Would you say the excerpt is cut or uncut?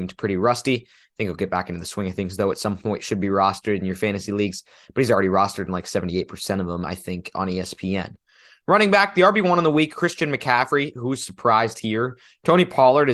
uncut